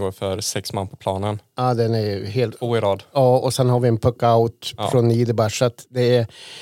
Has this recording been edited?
no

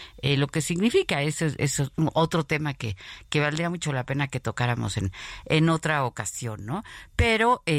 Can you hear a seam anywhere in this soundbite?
no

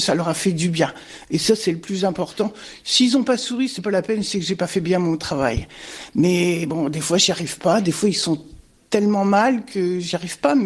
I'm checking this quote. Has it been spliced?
no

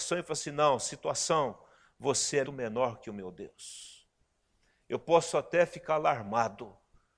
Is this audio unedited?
no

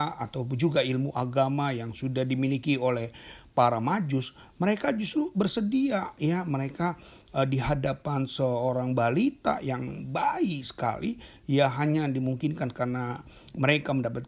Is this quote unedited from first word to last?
yes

